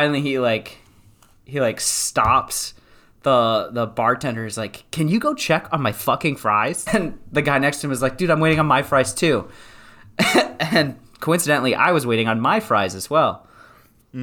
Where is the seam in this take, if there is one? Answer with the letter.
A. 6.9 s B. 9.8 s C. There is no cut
A